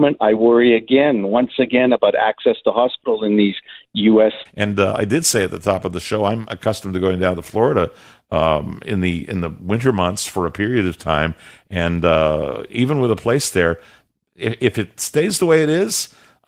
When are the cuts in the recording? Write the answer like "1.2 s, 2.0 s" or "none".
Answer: 4.5 s

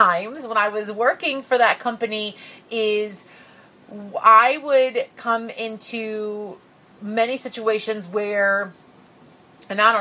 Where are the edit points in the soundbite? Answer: none

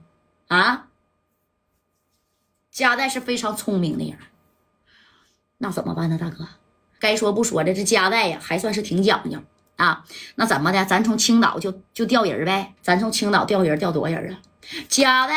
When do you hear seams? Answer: 7.0 s, 12.8 s

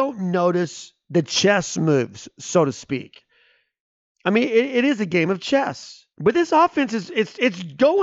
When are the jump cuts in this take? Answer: 6.1 s

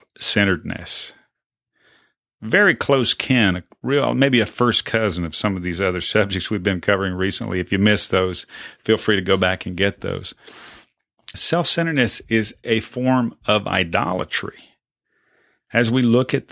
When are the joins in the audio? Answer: 11.3 s, 12.6 s

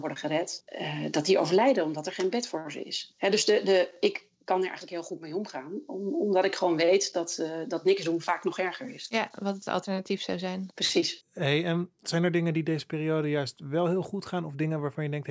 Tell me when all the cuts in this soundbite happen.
none

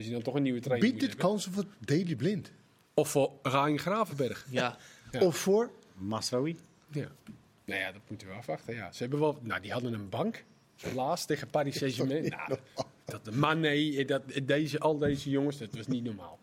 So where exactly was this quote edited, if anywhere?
none

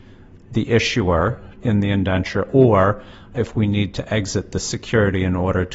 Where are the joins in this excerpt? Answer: 1.6 s, 3.3 s

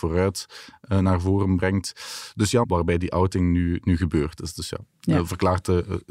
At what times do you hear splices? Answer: 2.6 s

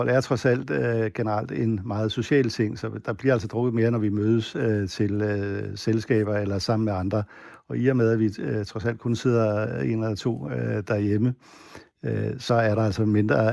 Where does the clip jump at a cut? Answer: none

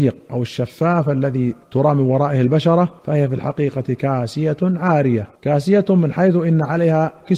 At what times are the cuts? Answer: 1.6 s, 3.0 s, 5.4 s

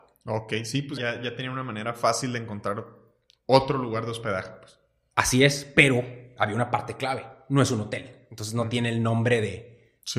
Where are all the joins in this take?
1.0 s

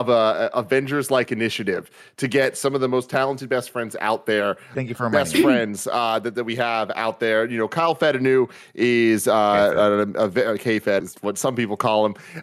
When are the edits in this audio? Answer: 4.7 s, 11.0 s

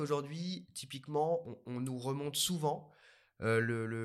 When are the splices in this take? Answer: none

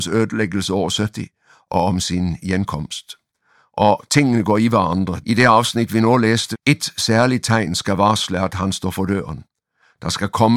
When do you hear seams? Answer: 5.2 s, 6.5 s

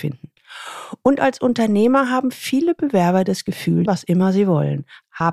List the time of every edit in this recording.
3.9 s

